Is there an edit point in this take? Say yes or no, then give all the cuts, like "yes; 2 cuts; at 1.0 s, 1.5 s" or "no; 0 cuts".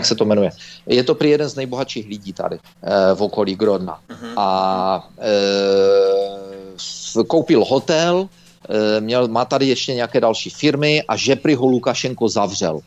no; 0 cuts